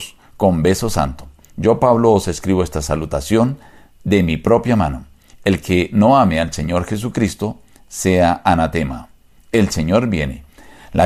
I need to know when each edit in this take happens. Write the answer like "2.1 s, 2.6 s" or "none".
none